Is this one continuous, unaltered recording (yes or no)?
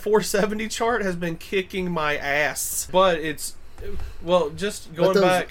no